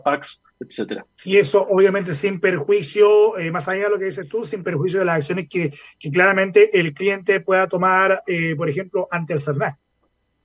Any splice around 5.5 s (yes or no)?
no